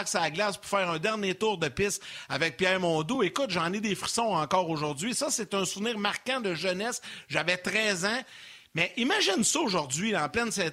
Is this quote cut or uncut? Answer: uncut